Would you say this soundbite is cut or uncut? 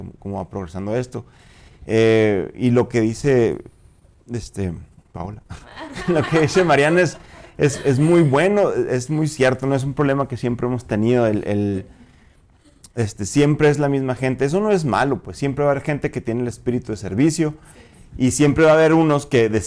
uncut